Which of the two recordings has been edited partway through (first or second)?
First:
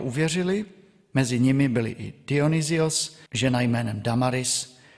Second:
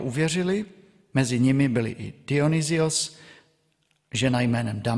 first